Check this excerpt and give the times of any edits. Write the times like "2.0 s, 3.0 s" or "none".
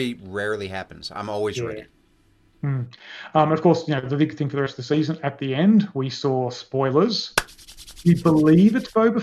none